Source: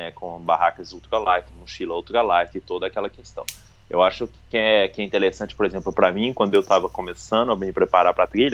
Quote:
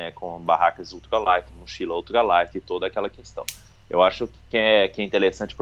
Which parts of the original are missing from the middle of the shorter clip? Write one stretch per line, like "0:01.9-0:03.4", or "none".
none